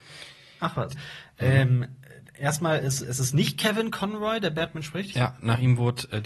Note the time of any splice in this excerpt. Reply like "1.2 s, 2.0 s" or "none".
0.9 s, 5.1 s